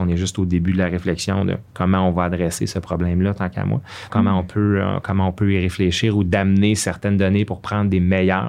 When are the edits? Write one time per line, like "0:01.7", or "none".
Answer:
0:04.1